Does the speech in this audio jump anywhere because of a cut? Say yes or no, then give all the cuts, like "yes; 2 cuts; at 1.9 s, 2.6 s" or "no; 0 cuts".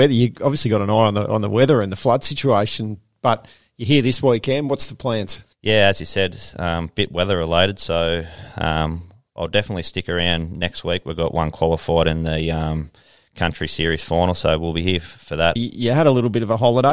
yes; 2 cuts; at 5.5 s, 15.6 s